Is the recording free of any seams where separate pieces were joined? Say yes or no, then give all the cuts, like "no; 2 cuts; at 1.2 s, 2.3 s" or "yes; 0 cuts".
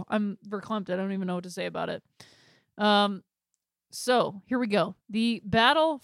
yes; 0 cuts